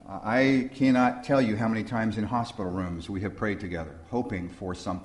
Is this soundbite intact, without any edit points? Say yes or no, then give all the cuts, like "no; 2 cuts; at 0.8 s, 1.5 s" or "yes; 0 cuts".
yes; 0 cuts